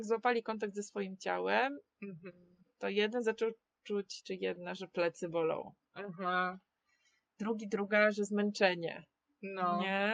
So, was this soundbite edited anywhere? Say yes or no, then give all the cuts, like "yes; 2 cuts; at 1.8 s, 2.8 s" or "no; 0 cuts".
no; 0 cuts